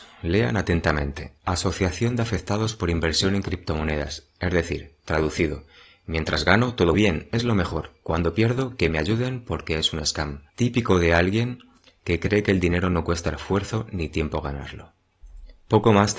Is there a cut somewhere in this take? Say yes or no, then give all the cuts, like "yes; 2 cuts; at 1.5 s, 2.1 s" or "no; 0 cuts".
yes; 2 cuts; at 6.9 s, 10.5 s